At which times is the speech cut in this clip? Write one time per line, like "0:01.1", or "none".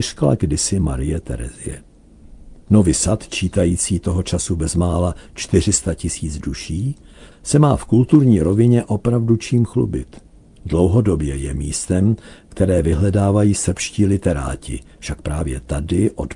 0:07.3